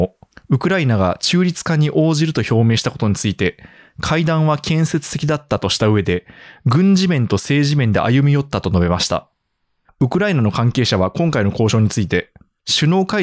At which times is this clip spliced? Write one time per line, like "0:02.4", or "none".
0:09.9